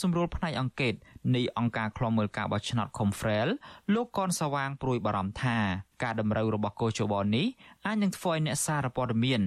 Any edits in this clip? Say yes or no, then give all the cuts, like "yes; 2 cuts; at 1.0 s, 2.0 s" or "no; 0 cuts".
yes; 1 cut; at 5.9 s